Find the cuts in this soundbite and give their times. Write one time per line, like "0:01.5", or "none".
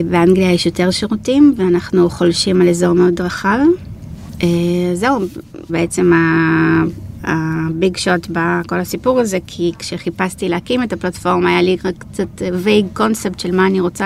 0:05.7